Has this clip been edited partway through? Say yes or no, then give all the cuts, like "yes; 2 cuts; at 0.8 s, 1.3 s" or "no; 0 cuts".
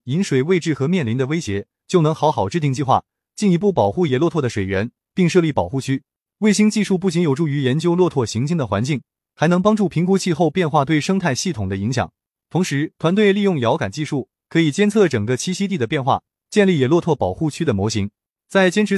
no; 0 cuts